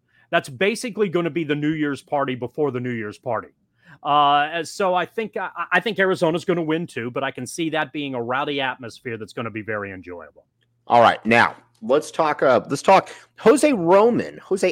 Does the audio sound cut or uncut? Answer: uncut